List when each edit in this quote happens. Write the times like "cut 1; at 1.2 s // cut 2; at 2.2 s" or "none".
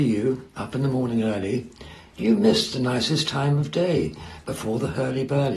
none